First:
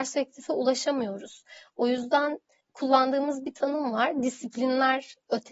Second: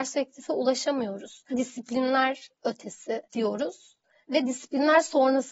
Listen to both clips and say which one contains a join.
second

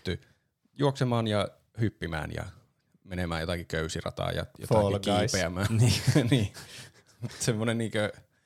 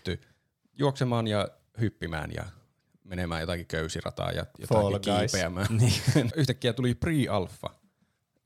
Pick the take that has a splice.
second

